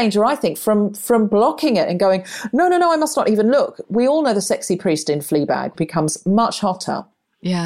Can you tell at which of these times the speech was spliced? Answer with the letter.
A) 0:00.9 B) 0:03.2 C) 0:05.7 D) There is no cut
C